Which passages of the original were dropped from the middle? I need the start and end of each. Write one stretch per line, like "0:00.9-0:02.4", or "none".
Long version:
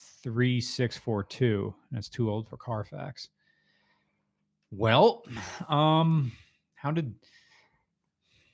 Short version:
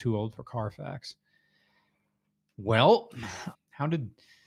0:05.6-0:06.6